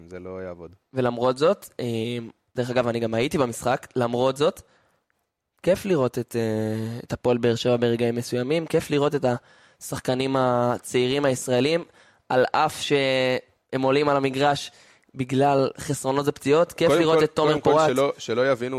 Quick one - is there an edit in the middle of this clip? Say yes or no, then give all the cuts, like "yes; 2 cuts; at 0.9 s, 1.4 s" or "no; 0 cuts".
no; 0 cuts